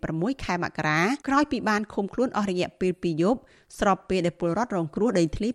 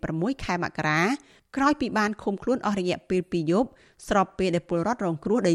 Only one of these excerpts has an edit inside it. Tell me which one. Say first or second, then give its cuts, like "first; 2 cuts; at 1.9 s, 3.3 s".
first; 1 cut; at 1.2 s